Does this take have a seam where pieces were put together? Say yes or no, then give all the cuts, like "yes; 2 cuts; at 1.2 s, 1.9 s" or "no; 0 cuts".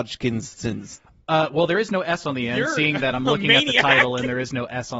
no; 0 cuts